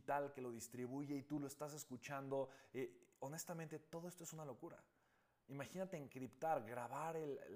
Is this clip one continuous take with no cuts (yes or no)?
yes